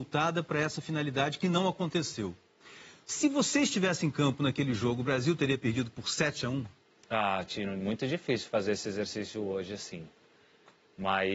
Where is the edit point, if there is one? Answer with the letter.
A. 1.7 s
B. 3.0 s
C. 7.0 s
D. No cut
B